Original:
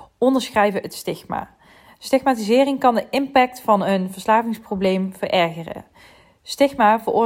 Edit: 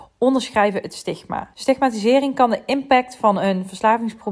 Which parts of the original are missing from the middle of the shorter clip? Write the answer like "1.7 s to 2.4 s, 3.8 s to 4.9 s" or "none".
1.5 s to 2.0 s